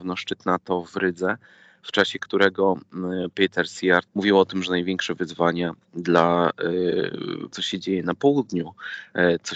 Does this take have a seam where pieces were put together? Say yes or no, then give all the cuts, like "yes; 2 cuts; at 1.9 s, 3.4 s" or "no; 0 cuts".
yes; 2 cuts; at 4.1 s, 7.5 s